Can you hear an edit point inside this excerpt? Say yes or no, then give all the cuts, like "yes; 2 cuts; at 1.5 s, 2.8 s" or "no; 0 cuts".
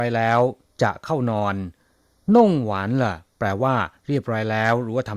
no; 0 cuts